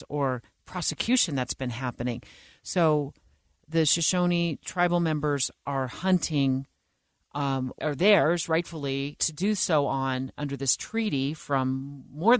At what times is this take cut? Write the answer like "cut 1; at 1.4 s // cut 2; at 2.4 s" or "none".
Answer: cut 1; at 7.8 s // cut 2; at 9.2 s